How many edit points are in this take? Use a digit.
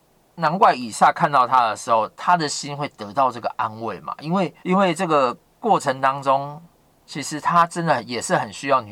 1